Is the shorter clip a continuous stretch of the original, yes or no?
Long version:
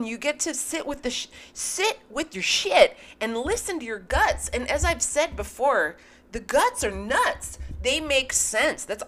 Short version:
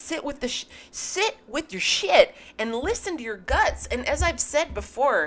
yes